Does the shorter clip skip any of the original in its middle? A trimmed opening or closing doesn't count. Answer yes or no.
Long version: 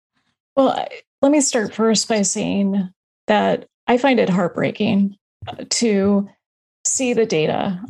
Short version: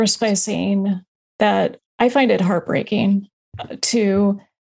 no